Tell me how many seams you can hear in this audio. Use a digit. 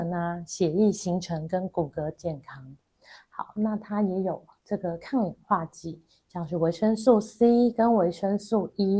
0